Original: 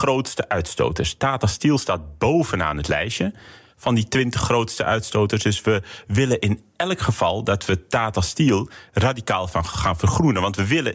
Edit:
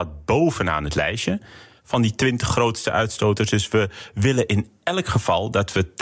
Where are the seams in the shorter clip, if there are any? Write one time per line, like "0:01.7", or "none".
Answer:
none